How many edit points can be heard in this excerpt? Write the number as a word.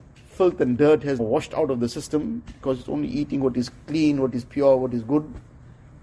one